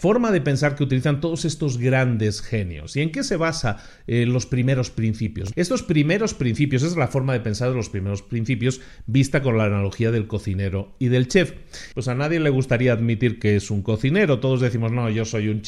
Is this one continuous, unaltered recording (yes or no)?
no